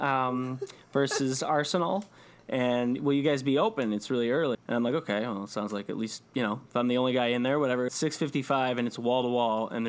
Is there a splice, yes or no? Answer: yes